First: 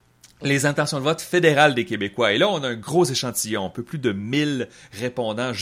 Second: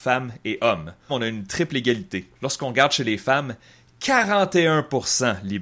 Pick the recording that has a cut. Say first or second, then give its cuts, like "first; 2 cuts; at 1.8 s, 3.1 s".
second; 2 cuts; at 1.1 s, 2.4 s